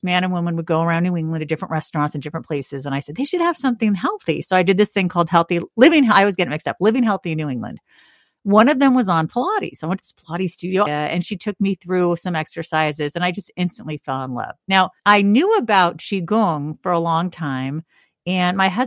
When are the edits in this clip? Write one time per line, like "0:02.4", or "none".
0:10.9
0:15.0